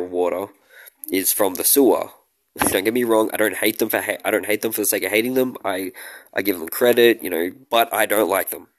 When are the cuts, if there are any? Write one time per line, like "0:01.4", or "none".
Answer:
0:02.7
0:07.6